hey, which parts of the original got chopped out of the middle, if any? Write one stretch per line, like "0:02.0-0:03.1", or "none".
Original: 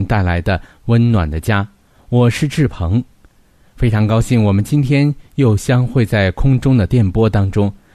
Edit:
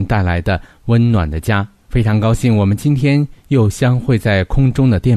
0:01.8-0:03.7